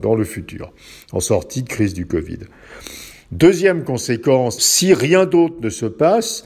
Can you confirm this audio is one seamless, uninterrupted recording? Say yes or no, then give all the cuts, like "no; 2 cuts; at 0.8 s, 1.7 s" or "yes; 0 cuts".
no; 2 cuts; at 3.1 s, 4.6 s